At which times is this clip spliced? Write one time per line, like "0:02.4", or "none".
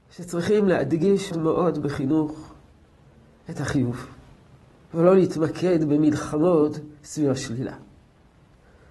0:01.3